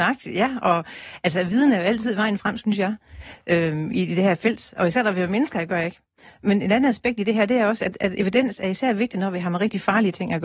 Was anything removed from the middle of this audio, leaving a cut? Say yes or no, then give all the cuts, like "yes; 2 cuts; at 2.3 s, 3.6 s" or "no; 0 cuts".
no; 0 cuts